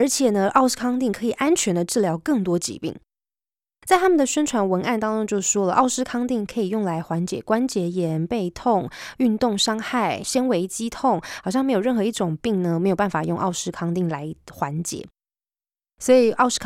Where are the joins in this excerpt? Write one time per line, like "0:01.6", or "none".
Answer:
none